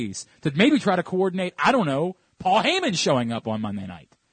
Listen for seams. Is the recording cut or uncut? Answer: uncut